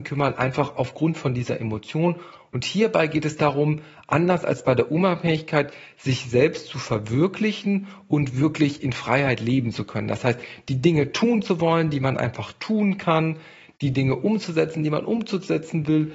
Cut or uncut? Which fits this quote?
uncut